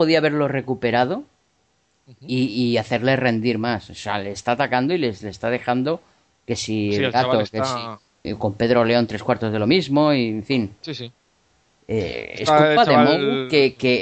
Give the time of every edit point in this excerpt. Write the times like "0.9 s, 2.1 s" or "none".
8.2 s